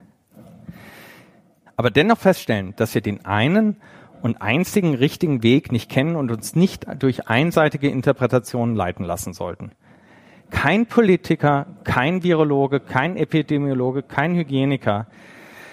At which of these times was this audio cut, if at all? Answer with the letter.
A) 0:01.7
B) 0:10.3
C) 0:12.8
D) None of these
A